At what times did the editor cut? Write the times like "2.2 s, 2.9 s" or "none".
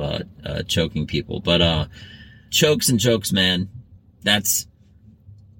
2.5 s

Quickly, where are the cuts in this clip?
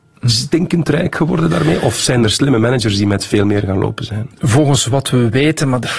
none

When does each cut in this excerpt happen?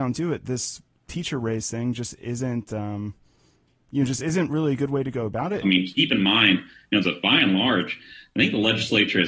5.6 s, 7.0 s

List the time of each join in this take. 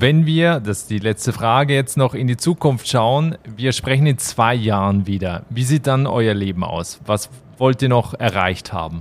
none

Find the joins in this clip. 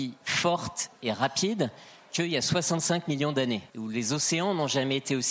3.7 s

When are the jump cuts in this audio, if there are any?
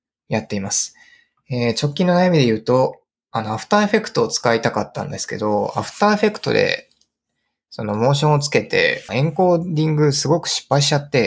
9.1 s

